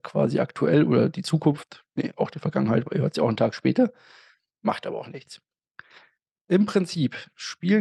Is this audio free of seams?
yes; 0 cuts

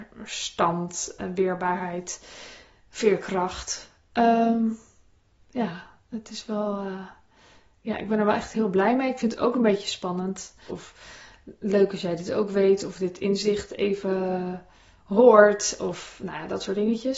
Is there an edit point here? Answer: yes; 1 cut; at 10.7 s

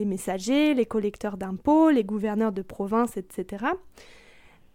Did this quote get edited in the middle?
no; 0 cuts

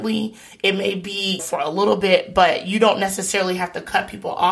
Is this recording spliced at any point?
yes; 1 cut; at 1.4 s

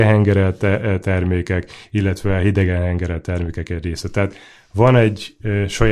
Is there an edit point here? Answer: no; 0 cuts

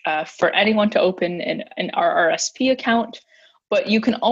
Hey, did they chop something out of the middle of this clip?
no; 0 cuts

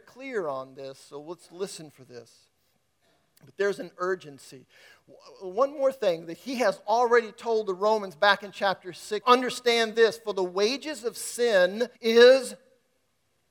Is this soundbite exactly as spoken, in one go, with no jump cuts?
no; 2 cuts; at 9.2 s, 11.9 s

